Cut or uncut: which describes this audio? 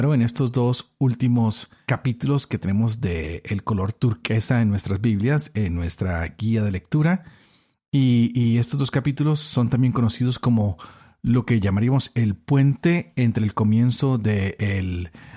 uncut